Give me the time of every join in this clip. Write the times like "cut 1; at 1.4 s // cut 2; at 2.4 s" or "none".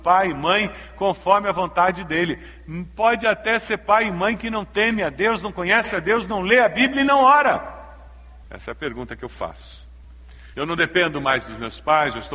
cut 1; at 8.5 s // cut 2; at 10.5 s